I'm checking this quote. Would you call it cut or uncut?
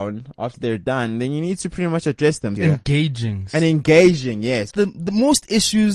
cut